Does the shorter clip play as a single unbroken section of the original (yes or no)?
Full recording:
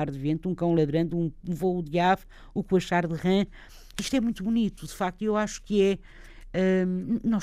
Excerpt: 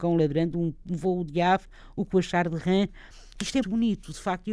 no